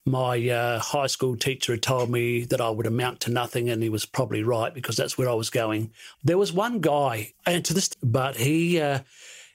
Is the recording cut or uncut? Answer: cut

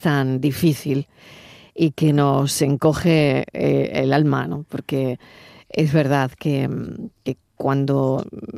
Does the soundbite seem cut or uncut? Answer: uncut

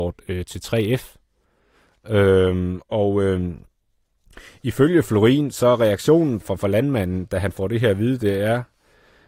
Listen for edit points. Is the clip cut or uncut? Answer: cut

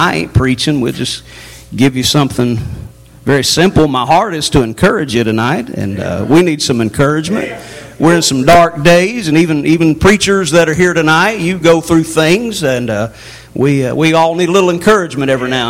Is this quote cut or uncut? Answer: uncut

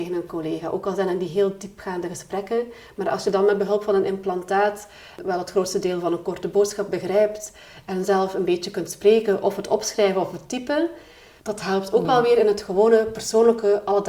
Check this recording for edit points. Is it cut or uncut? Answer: uncut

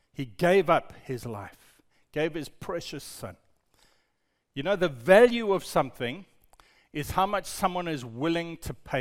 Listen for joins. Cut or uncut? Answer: uncut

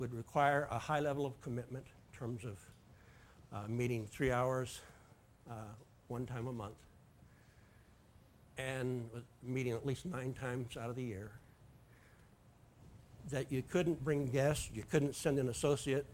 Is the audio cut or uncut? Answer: uncut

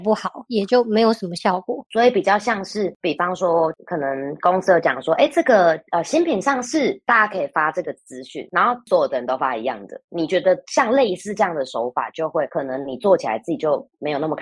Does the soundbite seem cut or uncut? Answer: uncut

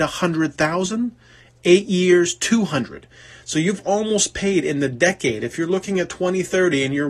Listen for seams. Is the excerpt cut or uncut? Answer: uncut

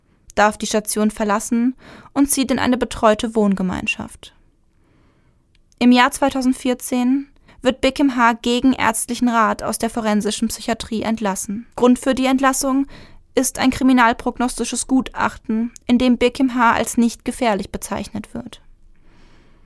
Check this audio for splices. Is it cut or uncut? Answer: cut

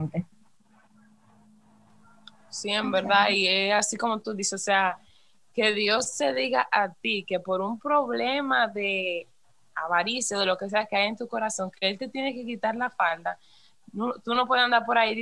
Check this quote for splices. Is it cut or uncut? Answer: uncut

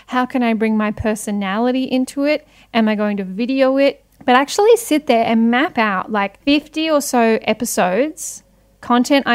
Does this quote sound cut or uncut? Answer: cut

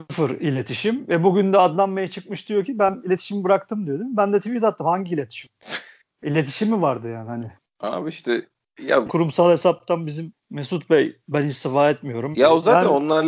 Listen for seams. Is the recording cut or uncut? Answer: cut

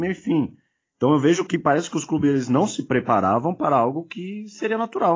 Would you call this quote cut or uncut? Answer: uncut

